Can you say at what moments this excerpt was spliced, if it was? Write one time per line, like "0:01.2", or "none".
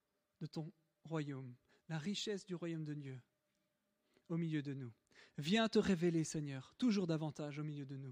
none

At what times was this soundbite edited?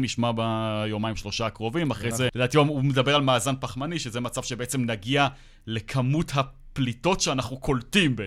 0:02.3

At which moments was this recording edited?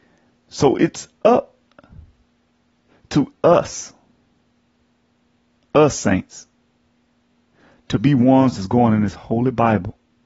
none

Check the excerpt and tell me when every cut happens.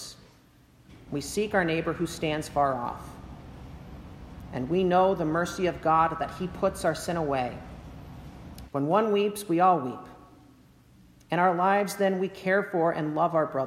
0:01.1
0:08.7

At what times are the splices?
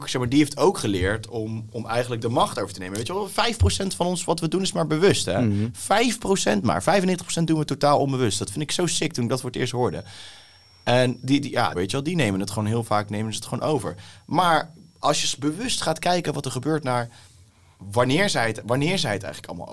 0:11.7

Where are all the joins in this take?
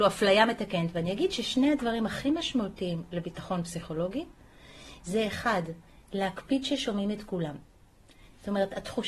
none

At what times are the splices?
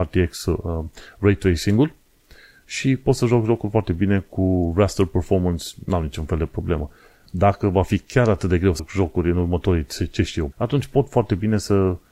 0:08.8
0:10.5

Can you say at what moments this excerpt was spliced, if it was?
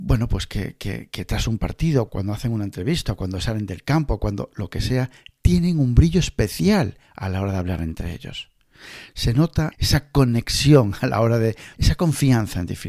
0:02.1
0:09.7
0:11.7

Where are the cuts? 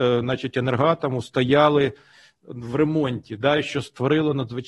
none

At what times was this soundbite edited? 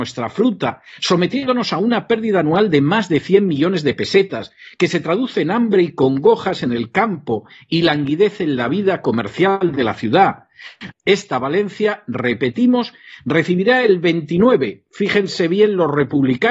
0:10.9

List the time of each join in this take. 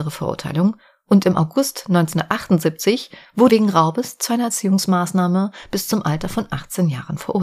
0:03.5

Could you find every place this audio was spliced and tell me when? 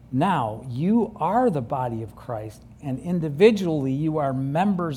none

